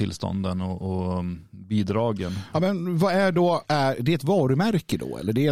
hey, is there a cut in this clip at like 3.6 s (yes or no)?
yes